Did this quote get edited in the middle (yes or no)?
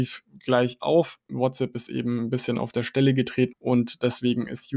yes